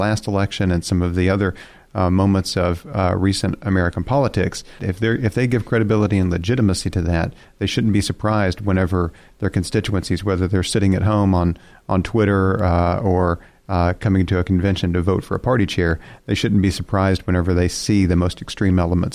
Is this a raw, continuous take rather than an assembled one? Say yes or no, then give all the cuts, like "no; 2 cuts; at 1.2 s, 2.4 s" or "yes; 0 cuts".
no; 1 cut; at 4.8 s